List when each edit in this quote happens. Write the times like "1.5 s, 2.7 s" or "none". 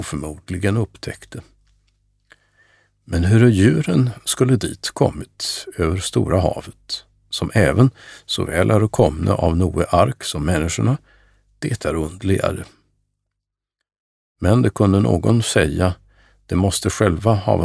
none